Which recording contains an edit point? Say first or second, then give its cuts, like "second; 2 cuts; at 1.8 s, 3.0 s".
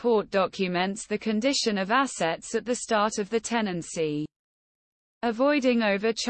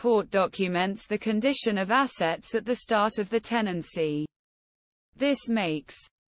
first; 1 cut; at 5.1 s